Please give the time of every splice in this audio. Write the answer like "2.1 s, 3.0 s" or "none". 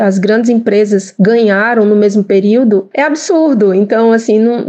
none